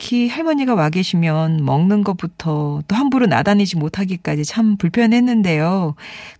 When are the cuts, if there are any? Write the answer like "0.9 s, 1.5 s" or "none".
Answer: none